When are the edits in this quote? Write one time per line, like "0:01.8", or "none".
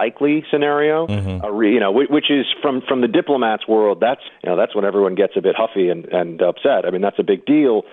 0:04.3